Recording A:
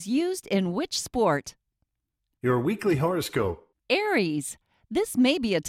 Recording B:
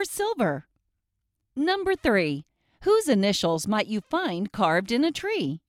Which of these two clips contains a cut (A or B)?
B